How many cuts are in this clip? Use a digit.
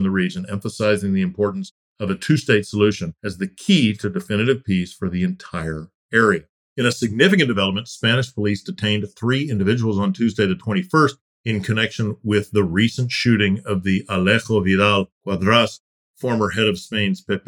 0